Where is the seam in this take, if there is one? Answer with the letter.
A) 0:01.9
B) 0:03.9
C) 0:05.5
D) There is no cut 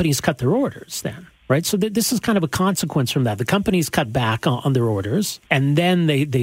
C